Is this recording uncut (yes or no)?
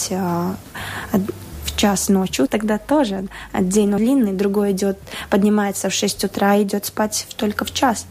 no